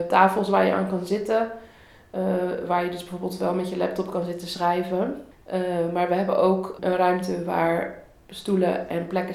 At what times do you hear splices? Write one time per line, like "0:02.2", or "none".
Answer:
0:05.3
0:06.8